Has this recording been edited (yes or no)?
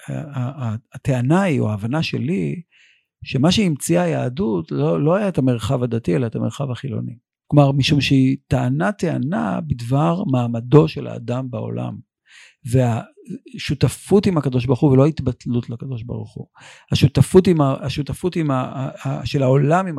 yes